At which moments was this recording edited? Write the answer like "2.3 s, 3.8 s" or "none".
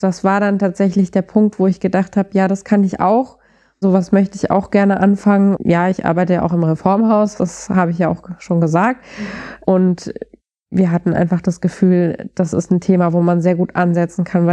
5.6 s